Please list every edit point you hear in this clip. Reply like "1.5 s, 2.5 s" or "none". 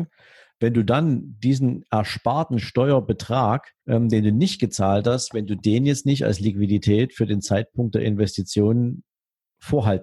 3.8 s